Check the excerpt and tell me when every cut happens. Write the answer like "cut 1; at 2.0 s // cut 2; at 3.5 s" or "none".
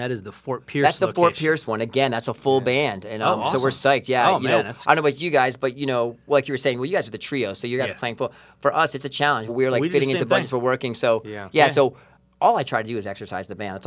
cut 1; at 9.5 s

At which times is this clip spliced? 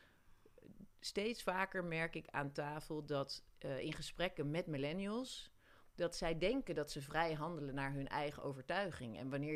none

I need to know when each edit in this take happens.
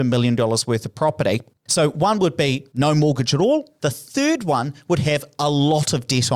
cut 1; at 1.5 s // cut 2; at 3.8 s

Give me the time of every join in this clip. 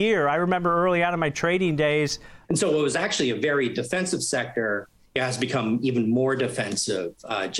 cut 1; at 2.4 s

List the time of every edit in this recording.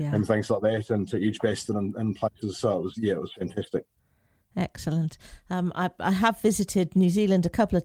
none

